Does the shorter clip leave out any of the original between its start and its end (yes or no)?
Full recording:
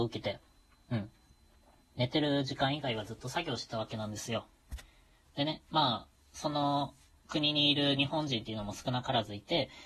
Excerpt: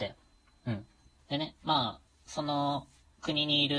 yes